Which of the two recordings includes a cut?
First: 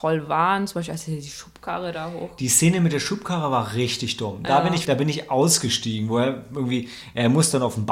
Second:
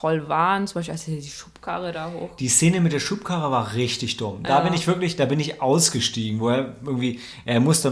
first; 1 cut; at 4.8 s

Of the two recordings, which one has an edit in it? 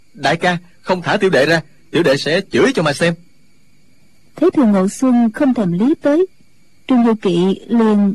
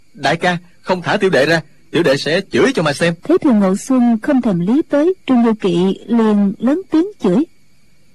second; 2 cuts; at 3.2 s, 5.2 s

